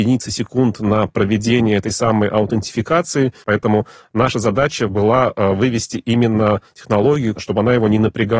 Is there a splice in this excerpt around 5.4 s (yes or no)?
no